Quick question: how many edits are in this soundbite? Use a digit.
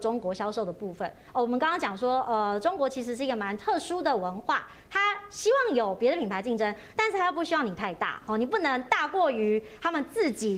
0